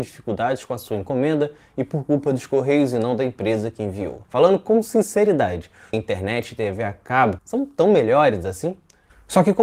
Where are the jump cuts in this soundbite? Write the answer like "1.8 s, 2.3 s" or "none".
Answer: 4.2 s, 5.9 s, 7.4 s